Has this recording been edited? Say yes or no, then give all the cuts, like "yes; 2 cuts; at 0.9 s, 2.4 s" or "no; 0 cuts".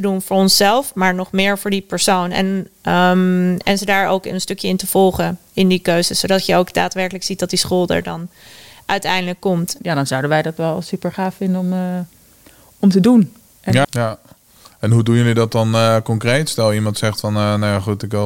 yes; 2 cuts; at 9.8 s, 13.8 s